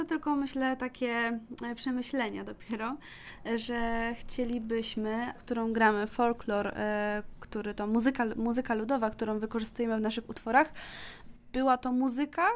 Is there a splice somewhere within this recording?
yes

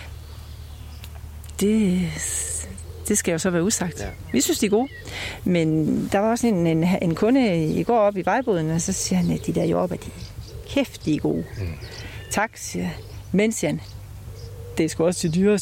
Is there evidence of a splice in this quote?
no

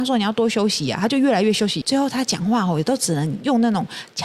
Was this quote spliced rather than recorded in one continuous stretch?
yes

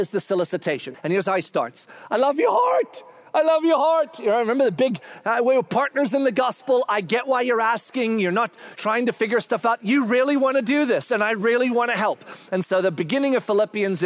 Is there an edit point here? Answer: yes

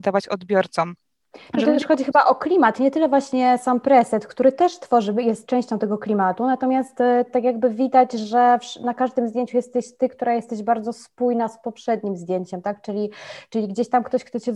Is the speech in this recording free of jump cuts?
yes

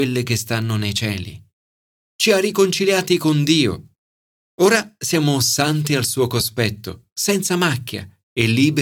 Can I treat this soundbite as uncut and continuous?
yes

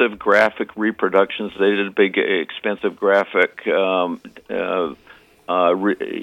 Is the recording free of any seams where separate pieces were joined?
yes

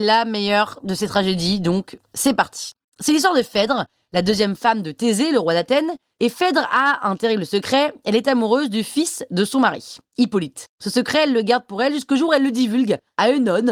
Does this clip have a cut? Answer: no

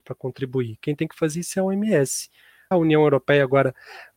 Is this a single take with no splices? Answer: no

